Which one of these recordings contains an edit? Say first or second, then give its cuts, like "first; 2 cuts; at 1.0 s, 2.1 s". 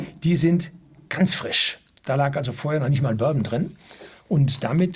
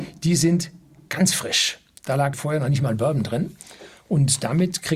second; 1 cut; at 2.3 s